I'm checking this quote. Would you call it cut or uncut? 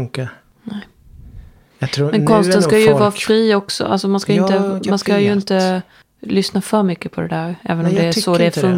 uncut